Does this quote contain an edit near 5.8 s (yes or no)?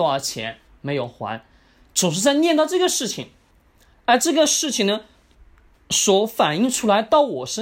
no